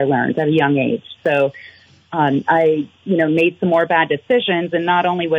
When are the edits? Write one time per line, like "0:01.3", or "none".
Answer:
none